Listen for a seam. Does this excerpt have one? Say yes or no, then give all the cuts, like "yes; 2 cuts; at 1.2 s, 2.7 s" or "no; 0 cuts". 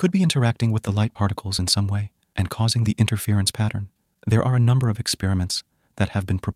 yes; 1 cut; at 4.1 s